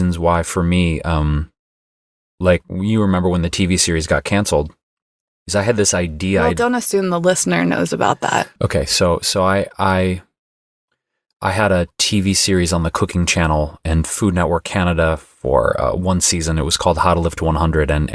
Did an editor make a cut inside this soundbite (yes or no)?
no